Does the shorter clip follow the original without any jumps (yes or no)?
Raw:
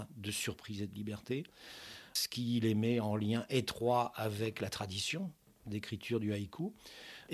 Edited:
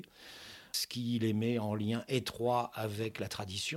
yes